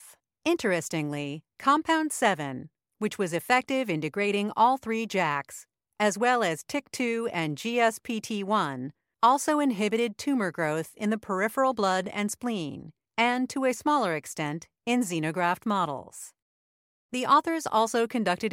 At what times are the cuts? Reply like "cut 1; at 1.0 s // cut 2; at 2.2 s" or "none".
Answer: cut 1; at 14.8 s